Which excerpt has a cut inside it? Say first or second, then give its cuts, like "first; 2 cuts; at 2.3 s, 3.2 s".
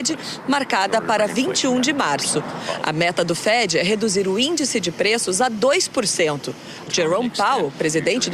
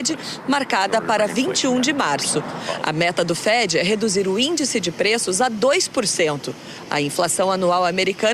first; 1 cut; at 6.9 s